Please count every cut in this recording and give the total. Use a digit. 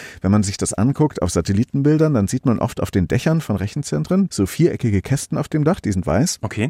0